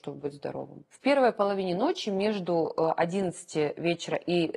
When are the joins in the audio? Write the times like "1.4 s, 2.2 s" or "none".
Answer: 0.9 s